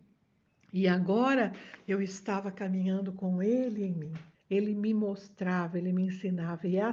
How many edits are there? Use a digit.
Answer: 1